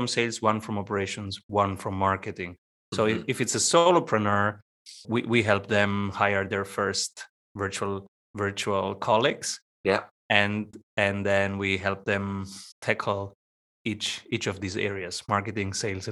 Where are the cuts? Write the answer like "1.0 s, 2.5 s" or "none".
5.0 s, 12.7 s